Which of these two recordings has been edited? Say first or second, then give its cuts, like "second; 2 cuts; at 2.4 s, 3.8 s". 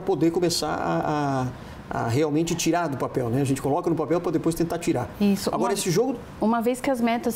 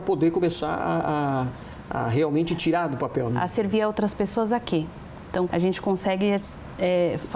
second; 2 cuts; at 3.3 s, 5.5 s